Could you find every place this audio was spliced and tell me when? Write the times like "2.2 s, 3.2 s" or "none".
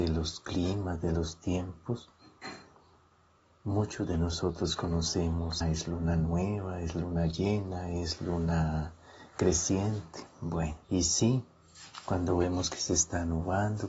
5.6 s, 10.8 s